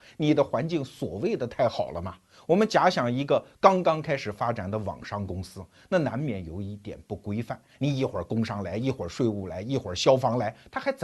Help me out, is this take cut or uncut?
uncut